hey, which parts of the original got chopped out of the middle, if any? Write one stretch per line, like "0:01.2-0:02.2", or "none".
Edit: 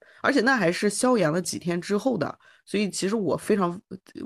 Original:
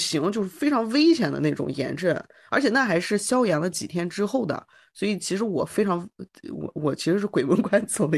none